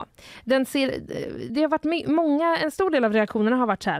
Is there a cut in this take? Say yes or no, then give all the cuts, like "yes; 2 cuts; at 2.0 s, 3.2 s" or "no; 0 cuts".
yes; 1 cut; at 1.5 s